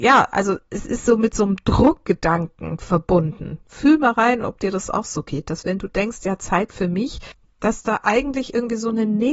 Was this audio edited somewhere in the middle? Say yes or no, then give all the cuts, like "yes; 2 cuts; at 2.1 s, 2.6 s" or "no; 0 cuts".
no; 0 cuts